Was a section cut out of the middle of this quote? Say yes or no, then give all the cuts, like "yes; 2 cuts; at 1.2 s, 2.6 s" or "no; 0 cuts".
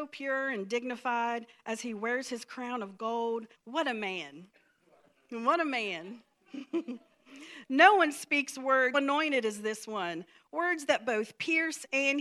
yes; 2 cuts; at 3.5 s, 8.9 s